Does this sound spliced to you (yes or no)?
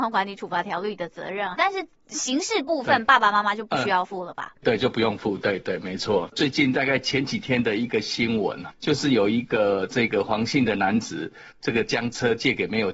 yes